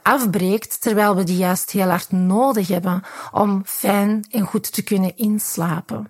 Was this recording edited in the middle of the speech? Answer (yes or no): no